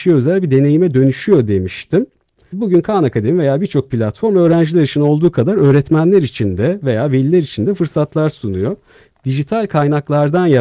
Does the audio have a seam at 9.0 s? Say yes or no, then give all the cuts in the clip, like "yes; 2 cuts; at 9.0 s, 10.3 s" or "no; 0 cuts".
no; 1 cut; at 2.5 s